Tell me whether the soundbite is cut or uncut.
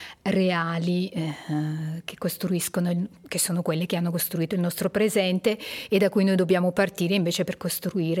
uncut